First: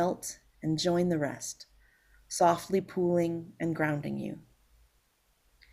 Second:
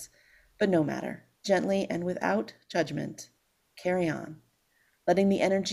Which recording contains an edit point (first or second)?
second